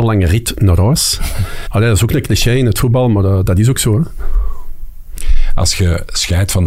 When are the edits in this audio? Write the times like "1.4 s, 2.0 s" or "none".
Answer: 1.7 s